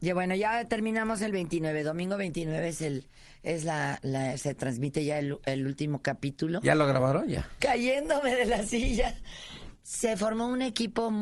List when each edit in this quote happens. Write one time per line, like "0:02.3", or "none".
0:07.6
0:09.7